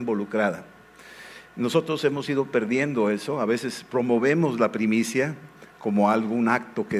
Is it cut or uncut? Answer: uncut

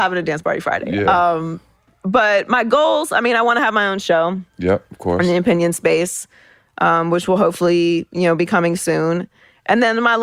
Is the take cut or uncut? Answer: uncut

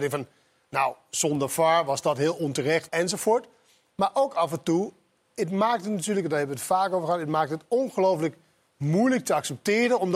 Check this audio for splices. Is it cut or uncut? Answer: cut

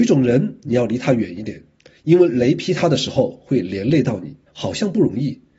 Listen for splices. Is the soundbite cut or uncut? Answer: cut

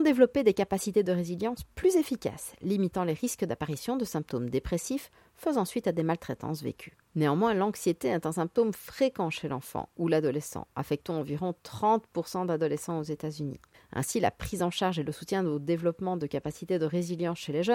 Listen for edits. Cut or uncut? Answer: cut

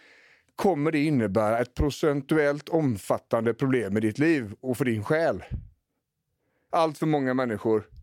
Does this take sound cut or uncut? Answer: cut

